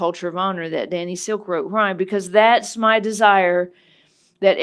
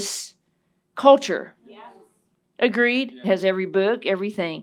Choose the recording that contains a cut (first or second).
second